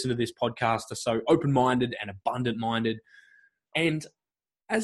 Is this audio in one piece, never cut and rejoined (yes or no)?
no